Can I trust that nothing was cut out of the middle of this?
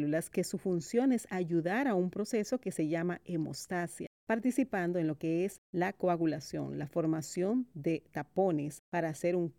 yes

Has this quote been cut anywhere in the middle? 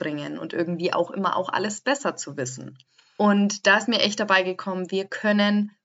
no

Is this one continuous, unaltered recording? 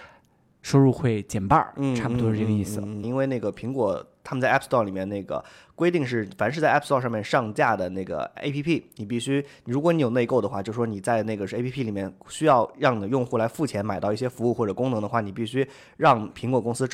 no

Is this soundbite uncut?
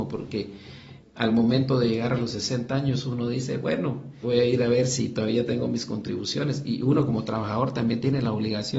no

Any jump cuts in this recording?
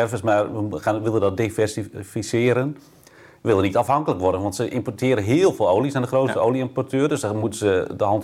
no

